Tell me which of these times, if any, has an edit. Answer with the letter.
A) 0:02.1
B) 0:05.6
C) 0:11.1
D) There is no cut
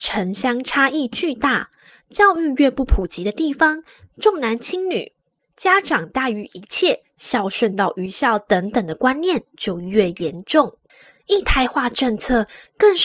D